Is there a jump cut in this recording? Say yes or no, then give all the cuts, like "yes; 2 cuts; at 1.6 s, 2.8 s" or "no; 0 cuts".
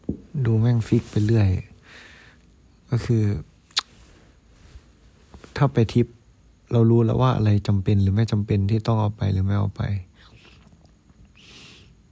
no; 0 cuts